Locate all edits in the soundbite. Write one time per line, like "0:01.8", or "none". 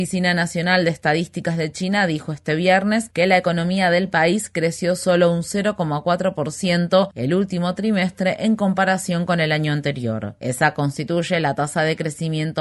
none

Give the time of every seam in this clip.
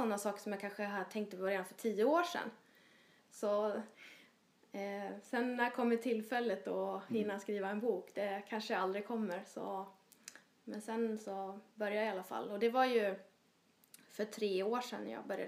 0:03.2

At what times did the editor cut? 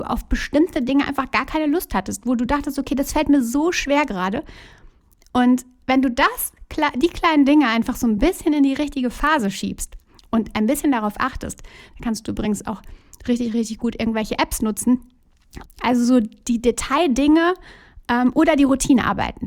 0:15.7

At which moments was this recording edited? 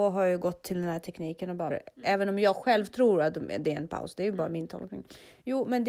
0:01.7

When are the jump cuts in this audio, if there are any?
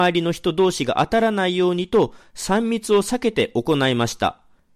none

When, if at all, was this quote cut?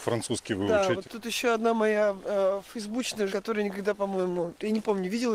0:01.0
0:03.3

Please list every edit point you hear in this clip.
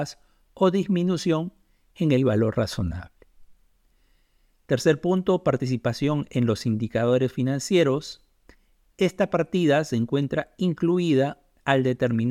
none

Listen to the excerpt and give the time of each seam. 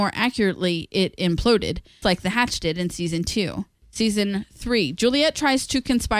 0:02.0
0:03.8

